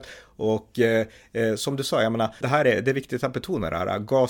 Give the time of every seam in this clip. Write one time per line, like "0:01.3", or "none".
0:02.4